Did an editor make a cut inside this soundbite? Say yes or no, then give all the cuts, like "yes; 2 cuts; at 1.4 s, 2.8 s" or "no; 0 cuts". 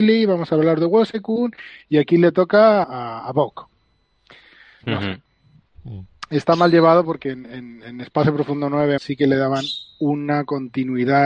yes; 2 cuts; at 2.8 s, 9.0 s